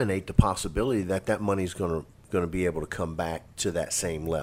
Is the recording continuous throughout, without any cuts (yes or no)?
yes